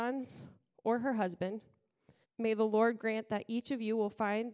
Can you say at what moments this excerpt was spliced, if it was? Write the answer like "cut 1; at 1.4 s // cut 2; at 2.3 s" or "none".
cut 1; at 2.2 s